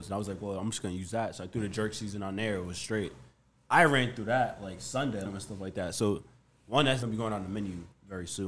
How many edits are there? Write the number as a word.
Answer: two